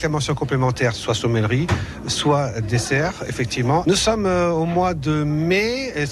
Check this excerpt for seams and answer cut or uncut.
cut